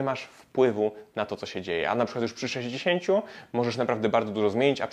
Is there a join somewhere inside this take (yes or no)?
no